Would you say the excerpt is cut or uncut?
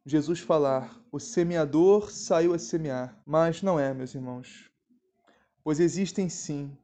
cut